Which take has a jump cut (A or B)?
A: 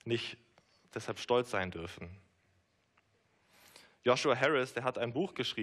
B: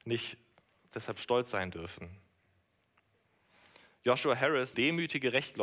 B